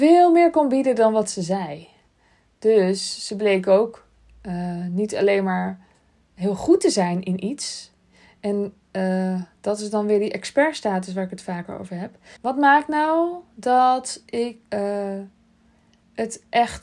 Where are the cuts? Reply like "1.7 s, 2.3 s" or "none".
12.4 s, 14.7 s